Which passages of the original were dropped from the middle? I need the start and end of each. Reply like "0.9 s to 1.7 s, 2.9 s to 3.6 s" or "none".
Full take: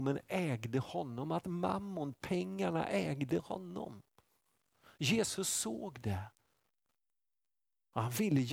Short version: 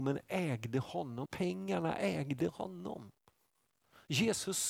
1.2 s to 2.2 s